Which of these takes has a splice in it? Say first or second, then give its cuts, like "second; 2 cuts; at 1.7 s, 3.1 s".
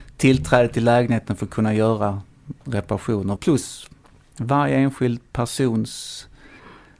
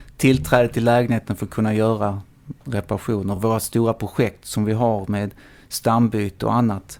first; 1 cut; at 3.4 s